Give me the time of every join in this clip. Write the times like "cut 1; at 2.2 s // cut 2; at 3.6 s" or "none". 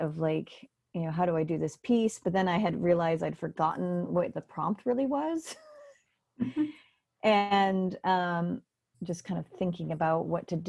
cut 1; at 8.9 s

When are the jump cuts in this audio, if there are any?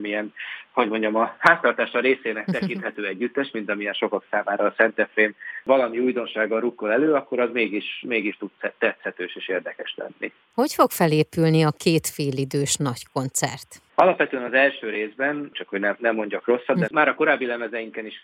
cut 1; at 15.5 s // cut 2; at 16.9 s

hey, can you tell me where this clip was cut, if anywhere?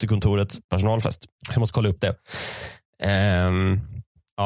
cut 1; at 1.4 s

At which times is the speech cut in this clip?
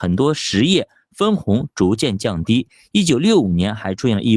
none

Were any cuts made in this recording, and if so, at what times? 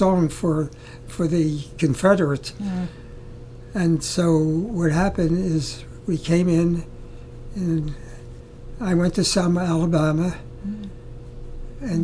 none

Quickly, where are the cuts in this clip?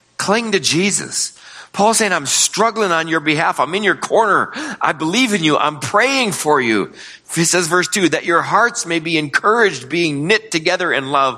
none

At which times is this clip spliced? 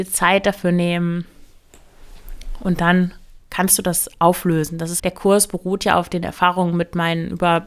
cut 1; at 5.0 s

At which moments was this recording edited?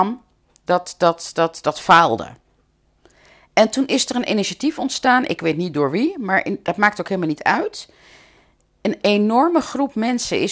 none

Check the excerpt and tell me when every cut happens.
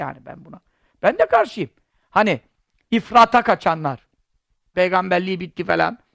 cut 1; at 4.7 s

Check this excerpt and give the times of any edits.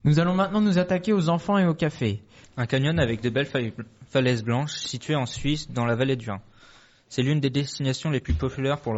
cut 1; at 2.4 s

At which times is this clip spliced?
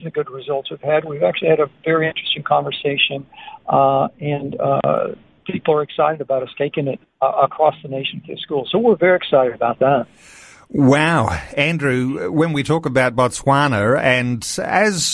cut 1; at 7.0 s

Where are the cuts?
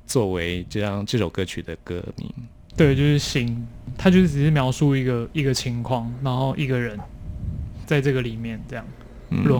cut 1; at 7.8 s

